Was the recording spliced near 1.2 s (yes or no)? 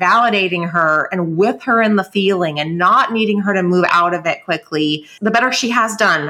no